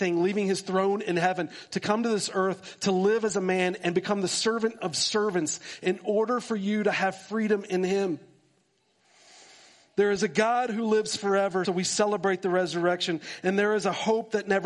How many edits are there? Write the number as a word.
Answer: one